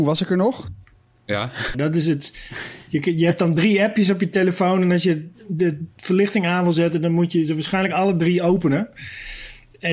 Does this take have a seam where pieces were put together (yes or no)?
yes